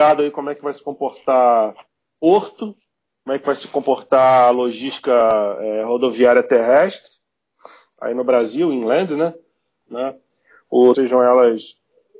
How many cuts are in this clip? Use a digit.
2